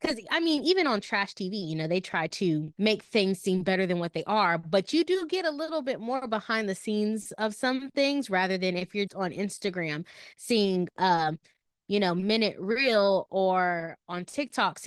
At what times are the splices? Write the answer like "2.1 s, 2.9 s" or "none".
2.7 s, 9.1 s